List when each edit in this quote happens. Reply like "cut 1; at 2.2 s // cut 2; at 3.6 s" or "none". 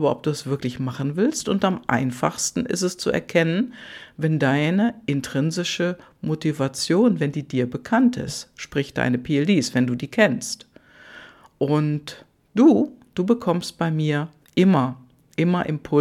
none